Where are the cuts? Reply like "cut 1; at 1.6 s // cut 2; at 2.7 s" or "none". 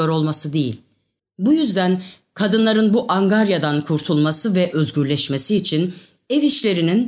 cut 1; at 1.2 s